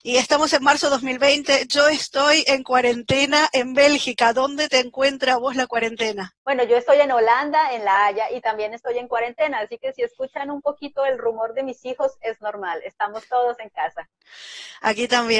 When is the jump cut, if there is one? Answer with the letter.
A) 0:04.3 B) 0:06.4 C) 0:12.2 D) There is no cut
B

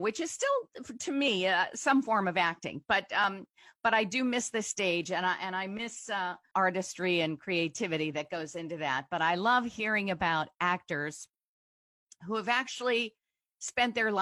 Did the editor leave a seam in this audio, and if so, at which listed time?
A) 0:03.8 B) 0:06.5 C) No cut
B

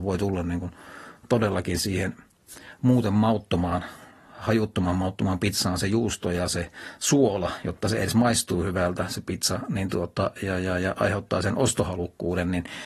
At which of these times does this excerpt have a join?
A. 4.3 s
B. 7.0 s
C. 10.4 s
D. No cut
C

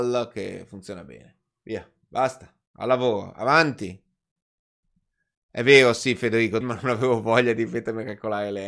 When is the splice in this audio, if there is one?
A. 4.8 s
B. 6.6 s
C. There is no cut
B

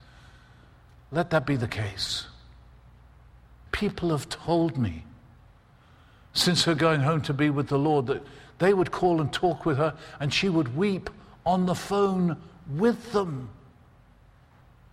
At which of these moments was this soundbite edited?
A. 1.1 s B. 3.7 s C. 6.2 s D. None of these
B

